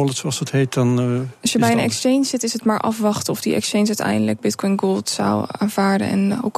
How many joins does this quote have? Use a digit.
0